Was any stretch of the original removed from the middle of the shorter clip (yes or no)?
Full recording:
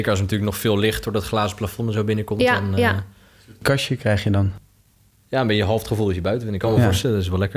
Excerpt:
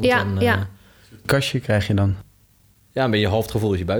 no